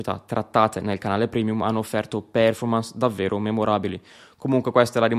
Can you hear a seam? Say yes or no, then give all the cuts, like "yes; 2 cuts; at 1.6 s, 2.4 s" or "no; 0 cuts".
no; 0 cuts